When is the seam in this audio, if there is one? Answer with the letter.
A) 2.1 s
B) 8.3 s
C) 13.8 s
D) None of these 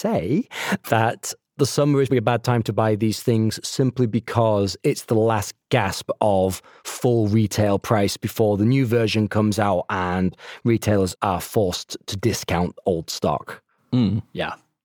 A